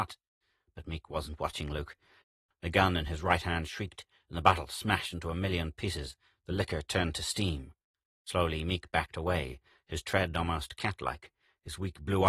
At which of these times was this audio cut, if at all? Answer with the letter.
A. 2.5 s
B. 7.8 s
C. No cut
A